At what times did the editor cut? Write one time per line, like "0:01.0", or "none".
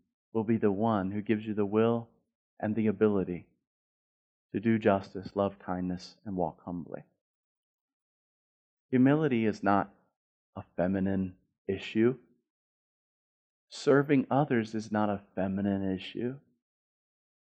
none